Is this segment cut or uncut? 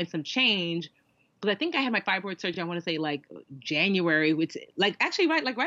uncut